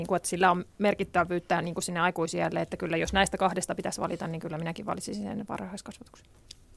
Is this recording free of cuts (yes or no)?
yes